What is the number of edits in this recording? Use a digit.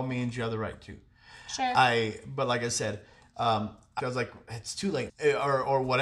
2